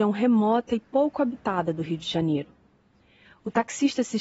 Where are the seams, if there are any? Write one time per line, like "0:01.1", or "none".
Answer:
none

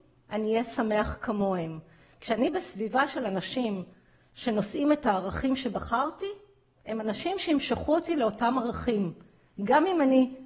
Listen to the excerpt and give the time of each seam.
none

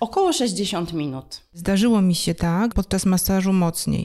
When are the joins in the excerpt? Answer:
0:02.7

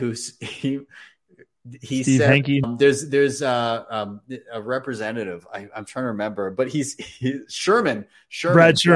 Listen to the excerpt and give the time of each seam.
0:02.6

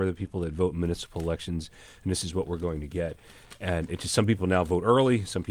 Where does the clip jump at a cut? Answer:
none

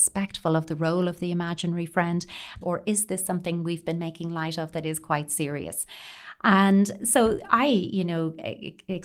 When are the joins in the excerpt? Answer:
0:02.6

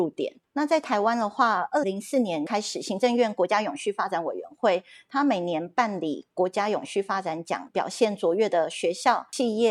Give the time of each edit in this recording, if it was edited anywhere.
0:01.8
0:07.7

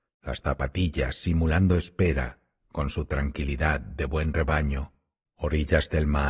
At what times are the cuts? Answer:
0:05.3

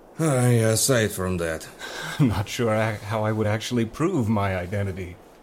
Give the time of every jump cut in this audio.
none

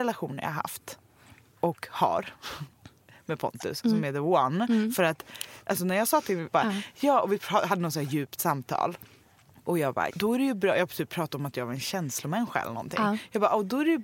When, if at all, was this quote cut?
0:06.5
0:10.1

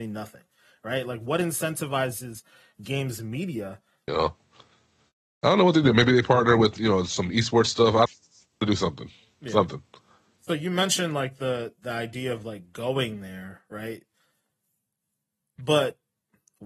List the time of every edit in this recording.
0:04.1

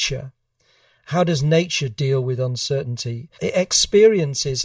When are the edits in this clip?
0:03.4

